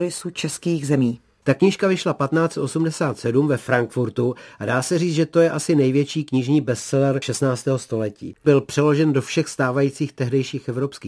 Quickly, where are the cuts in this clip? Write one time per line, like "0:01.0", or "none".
0:01.4